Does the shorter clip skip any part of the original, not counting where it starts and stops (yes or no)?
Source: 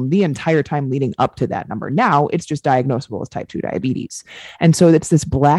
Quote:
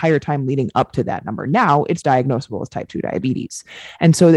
yes